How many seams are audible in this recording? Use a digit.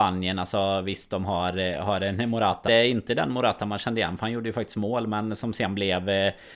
1